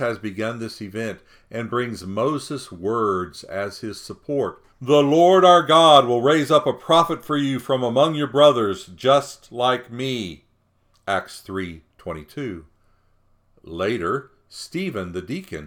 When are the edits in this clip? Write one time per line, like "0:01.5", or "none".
0:04.7

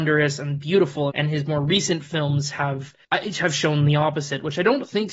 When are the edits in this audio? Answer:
0:01.1
0:03.0

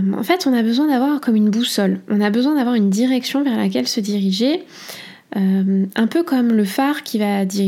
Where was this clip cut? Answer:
none

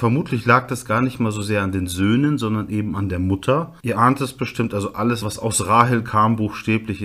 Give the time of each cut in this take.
0:03.8
0:05.2

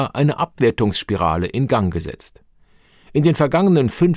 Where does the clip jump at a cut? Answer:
none

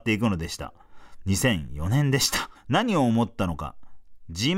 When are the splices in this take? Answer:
0:02.5

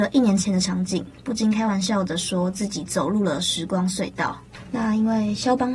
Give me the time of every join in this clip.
none

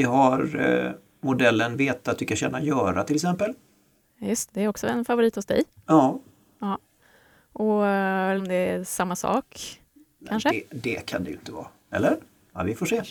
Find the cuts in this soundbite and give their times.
0:04.5
0:08.4

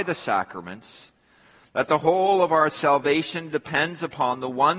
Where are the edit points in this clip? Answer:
none

